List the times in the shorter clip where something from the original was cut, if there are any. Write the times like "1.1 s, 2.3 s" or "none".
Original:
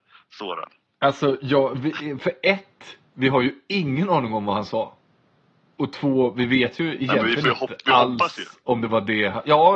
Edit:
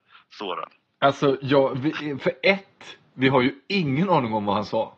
none

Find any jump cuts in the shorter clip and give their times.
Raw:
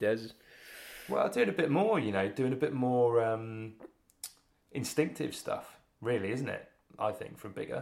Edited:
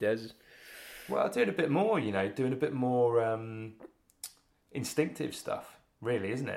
none

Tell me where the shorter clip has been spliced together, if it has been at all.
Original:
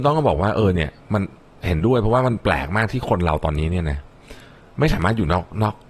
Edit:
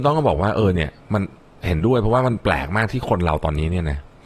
none

